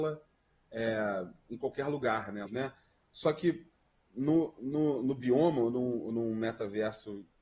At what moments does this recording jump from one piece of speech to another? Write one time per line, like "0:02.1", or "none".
0:02.4

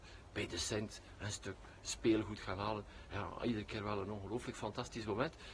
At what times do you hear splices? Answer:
none

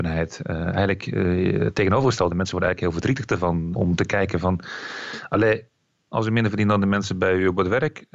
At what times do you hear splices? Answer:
0:03.7
0:06.1

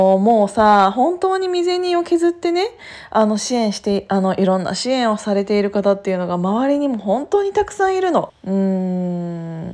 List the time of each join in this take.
0:08.3

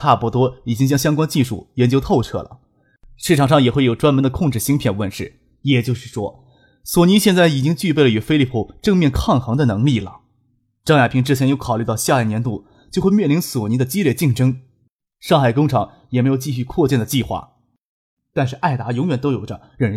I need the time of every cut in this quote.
0:18.2

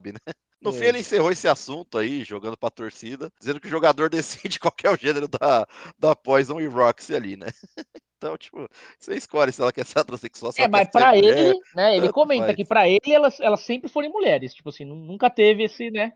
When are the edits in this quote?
none

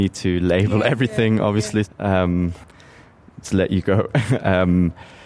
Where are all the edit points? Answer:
0:01.8
0:03.4

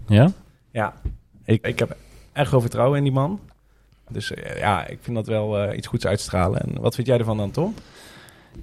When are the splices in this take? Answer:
0:01.6
0:04.1

